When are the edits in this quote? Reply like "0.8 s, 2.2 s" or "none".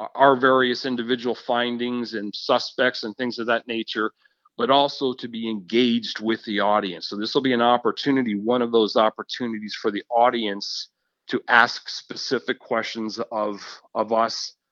none